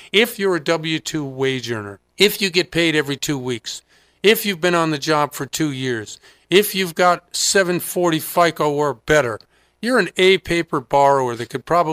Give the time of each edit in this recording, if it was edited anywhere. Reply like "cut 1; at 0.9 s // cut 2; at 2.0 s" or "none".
cut 1; at 2.1 s